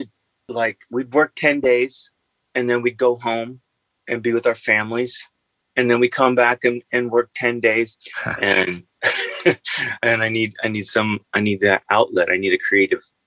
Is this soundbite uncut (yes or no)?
no